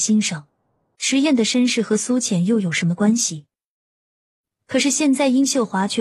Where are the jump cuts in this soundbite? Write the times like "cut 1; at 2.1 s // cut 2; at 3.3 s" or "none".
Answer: cut 1; at 1.0 s